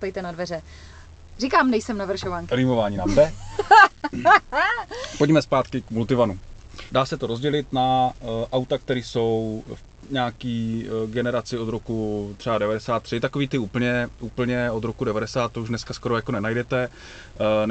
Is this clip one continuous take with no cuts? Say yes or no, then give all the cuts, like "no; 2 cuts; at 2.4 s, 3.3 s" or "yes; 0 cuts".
no; 1 cut; at 6.9 s